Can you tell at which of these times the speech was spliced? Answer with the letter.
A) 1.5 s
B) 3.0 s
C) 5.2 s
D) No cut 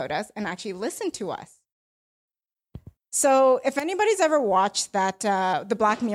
B